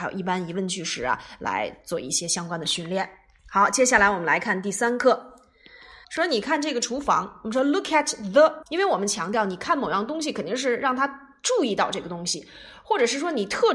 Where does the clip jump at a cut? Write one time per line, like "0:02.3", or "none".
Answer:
0:06.0
0:08.6